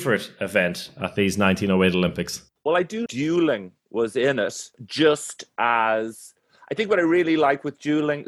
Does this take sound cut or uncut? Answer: cut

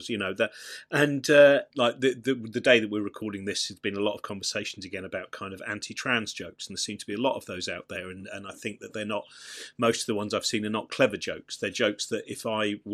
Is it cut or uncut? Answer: cut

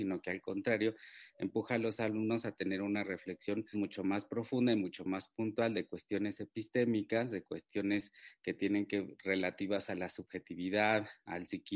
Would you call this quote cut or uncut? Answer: cut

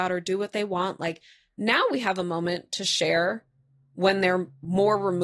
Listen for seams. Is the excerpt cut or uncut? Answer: uncut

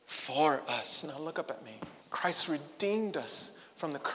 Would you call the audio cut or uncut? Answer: cut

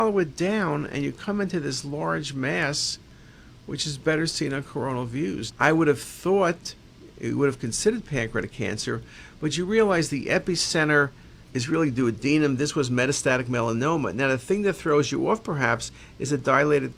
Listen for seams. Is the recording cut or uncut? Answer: cut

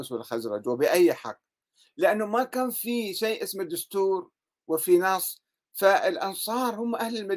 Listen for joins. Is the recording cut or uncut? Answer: uncut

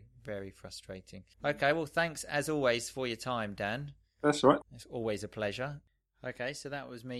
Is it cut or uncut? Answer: cut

